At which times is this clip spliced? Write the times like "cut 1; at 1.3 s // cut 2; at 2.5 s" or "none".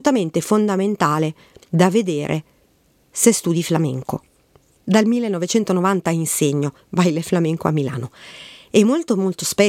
cut 1; at 4.8 s